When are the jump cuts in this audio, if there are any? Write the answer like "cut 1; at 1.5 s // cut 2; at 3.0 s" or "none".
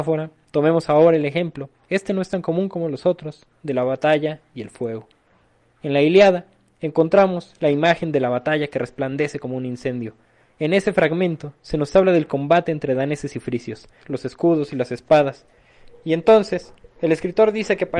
cut 1; at 10.5 s // cut 2; at 14.0 s